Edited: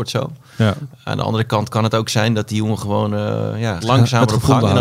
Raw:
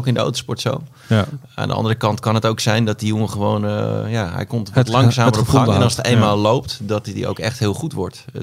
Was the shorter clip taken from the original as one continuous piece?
no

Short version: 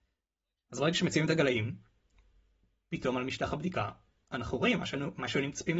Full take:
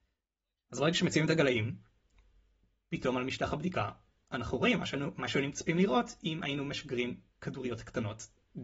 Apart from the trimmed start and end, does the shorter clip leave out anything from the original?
no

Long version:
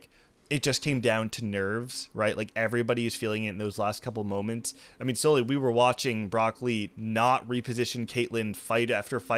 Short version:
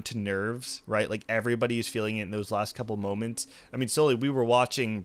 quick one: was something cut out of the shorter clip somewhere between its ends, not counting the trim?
no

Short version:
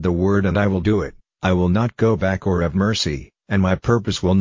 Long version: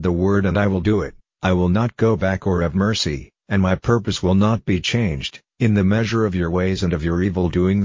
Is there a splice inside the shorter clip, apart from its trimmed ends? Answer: no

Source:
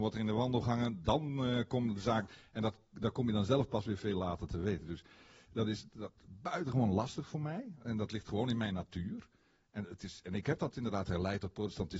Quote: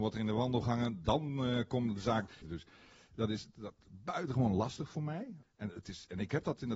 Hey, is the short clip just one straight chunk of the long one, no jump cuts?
no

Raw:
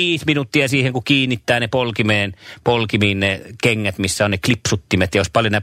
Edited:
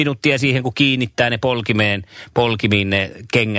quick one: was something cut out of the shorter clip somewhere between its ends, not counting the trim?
no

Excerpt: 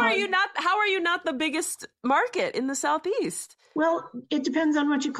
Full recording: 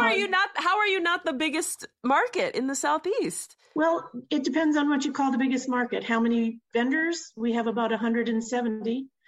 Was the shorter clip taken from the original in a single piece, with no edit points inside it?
yes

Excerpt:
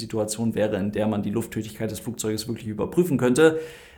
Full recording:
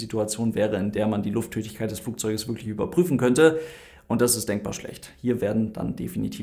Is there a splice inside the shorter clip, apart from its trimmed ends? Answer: no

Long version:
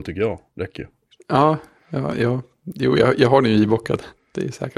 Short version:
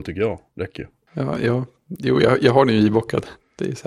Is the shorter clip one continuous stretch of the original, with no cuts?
no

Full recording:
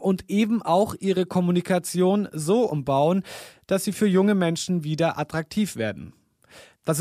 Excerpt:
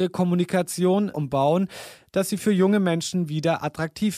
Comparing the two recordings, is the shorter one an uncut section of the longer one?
no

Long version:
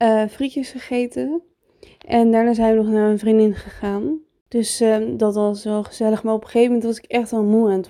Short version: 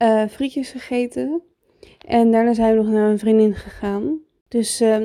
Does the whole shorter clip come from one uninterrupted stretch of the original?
yes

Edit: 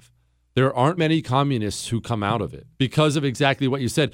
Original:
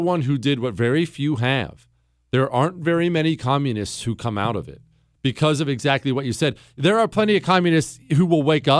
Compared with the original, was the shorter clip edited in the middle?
yes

